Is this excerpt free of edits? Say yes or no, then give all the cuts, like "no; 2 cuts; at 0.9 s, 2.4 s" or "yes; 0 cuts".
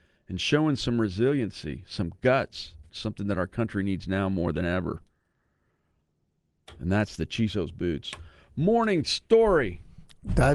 no; 1 cut; at 2.9 s